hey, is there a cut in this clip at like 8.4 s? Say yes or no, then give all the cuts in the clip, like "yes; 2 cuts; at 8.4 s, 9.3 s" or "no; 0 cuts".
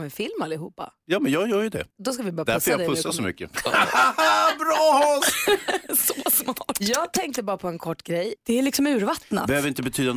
yes; 2 cuts; at 1.9 s, 8.4 s